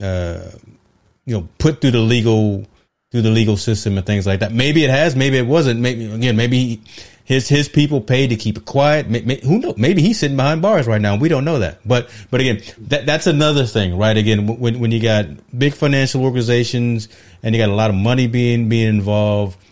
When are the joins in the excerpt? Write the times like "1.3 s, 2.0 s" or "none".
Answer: none